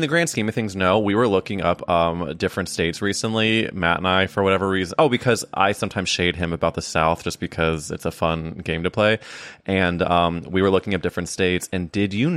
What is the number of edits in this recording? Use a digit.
0